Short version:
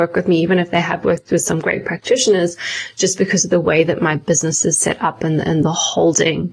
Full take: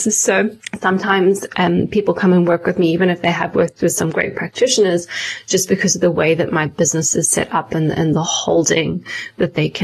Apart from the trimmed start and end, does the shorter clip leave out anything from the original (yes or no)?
no